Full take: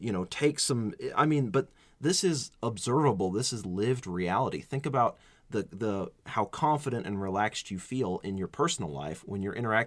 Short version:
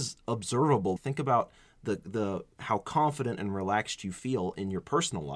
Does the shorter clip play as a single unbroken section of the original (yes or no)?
no